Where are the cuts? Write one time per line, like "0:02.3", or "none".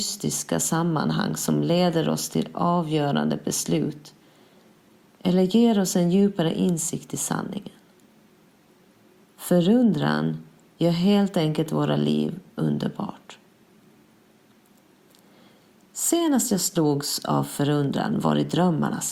none